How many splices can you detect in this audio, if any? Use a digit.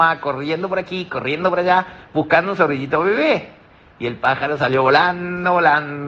0